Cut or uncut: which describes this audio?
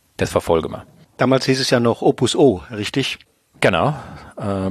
uncut